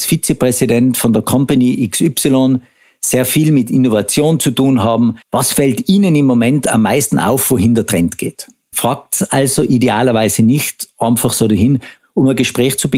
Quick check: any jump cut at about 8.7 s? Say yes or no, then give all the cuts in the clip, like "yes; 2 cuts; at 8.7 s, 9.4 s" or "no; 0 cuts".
yes; 3 cuts; at 5.2 s, 8.7 s, 12.0 s